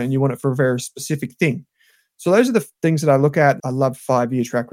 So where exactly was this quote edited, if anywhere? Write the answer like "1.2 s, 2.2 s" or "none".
2.1 s, 3.6 s